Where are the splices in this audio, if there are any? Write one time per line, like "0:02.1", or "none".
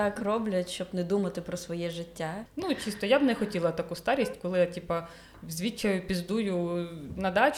0:02.5